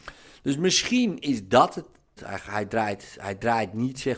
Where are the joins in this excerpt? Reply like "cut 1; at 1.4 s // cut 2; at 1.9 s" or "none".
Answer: cut 1; at 2.2 s